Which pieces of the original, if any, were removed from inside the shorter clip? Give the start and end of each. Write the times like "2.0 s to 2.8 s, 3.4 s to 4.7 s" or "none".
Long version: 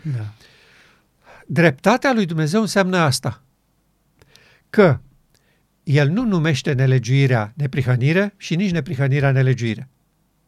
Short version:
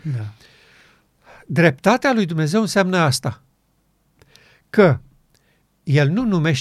none

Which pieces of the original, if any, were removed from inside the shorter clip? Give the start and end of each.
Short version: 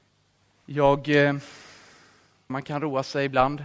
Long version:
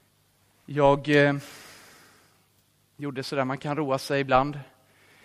2.5 s to 3.5 s

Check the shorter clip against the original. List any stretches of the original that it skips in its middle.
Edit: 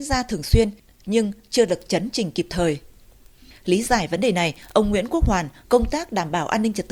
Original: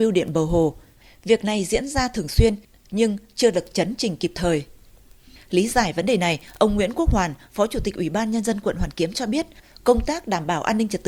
7.5 s to 9.8 s

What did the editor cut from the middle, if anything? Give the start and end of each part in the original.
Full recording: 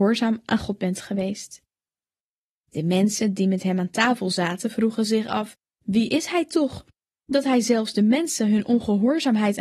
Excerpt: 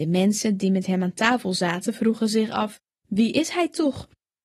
none

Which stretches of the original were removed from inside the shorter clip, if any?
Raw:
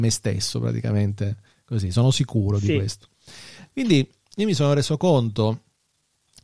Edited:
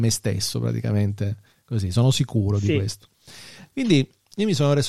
none

